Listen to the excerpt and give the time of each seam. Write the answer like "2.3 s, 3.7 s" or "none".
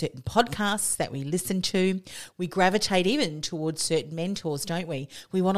2.3 s

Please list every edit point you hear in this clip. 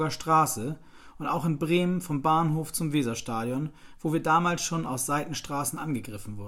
none

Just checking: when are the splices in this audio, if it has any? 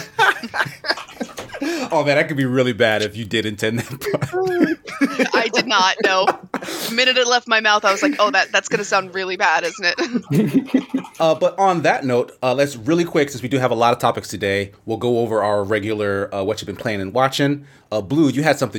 none

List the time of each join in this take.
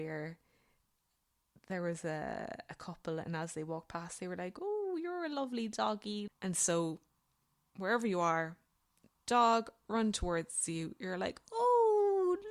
6.3 s

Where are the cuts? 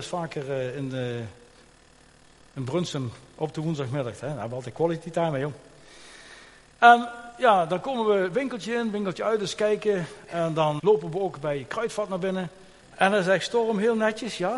10.8 s, 12.8 s

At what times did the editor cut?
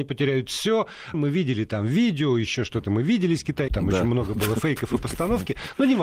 1.1 s, 3.7 s

